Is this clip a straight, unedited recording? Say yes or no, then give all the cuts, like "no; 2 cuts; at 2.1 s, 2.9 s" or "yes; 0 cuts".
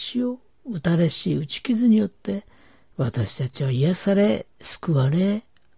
yes; 0 cuts